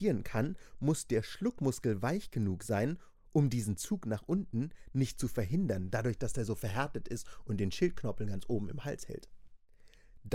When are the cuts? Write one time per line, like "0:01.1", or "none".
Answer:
none